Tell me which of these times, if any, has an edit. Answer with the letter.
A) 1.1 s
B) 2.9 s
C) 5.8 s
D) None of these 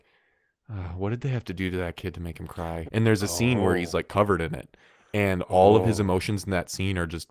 B